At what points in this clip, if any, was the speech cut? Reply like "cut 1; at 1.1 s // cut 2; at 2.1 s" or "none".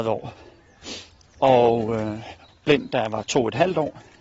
cut 1; at 2.5 s